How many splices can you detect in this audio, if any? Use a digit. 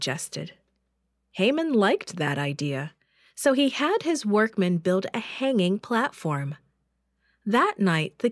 0